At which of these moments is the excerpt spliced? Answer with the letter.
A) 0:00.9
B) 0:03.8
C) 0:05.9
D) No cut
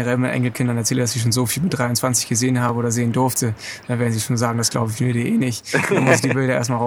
D